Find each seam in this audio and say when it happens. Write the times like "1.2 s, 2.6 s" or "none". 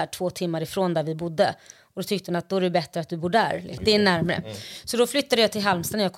3.8 s